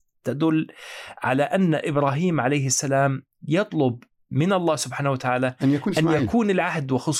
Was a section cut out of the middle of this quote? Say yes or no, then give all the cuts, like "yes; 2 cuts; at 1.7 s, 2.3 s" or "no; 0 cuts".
no; 0 cuts